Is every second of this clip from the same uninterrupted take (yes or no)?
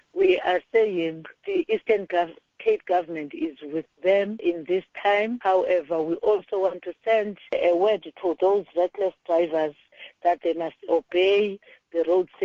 yes